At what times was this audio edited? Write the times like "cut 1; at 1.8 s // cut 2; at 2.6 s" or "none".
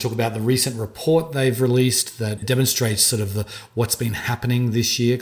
none